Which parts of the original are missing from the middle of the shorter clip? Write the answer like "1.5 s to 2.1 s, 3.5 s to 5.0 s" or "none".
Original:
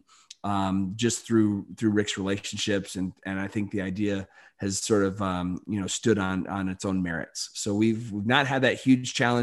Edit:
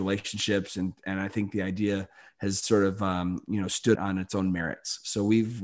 6.1 s to 6.5 s